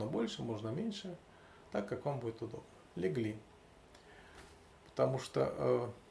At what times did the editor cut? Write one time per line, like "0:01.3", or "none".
0:04.7